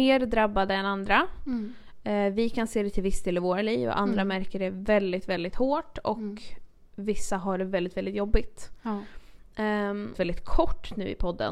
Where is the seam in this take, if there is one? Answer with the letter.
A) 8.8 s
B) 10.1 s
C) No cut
B